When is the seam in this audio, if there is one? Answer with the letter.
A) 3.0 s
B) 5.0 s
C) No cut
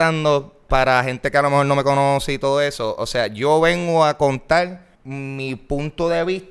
B